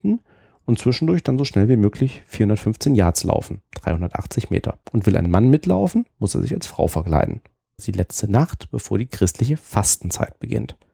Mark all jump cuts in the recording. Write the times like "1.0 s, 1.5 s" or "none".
3.6 s, 4.8 s, 7.8 s